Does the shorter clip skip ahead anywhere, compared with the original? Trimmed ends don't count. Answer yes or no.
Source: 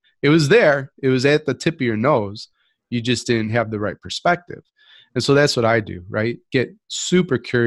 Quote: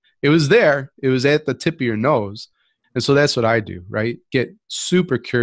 yes